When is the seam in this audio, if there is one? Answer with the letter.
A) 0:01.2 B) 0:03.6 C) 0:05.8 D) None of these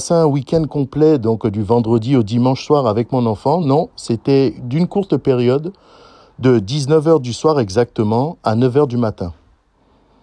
D